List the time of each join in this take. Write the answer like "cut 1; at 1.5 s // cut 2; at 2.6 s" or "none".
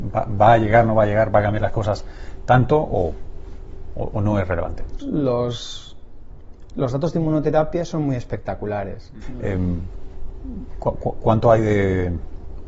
cut 1; at 5.0 s // cut 2; at 9.2 s